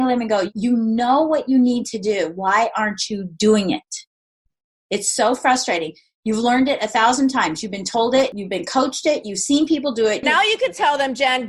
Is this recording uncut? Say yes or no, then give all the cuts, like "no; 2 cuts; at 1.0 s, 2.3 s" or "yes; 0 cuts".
no; 1 cut; at 10.2 s